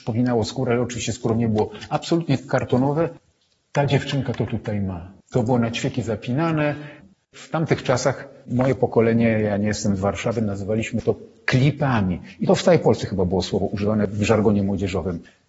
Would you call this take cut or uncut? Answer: cut